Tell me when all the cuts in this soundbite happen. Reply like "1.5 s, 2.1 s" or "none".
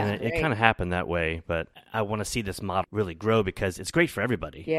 2.8 s